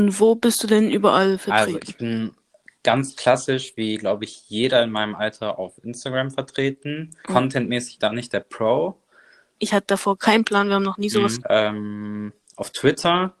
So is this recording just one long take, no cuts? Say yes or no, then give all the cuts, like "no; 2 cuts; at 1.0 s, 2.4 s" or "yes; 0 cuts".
no; 3 cuts; at 7.2 s, 9.6 s, 11.4 s